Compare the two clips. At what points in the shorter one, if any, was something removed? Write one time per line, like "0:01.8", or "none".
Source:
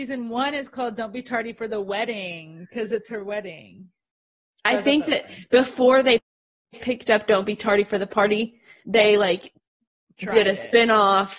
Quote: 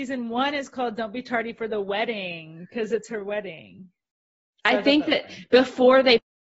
none